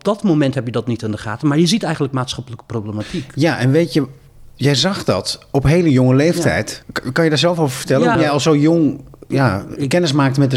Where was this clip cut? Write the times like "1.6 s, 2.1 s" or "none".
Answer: 6.8 s, 8.2 s